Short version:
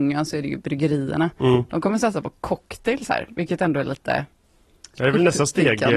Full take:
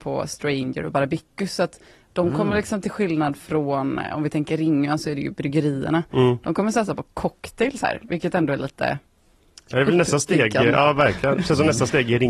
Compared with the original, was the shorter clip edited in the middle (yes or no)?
no